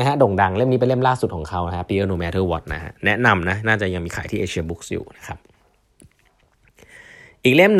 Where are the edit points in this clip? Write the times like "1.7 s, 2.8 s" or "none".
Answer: none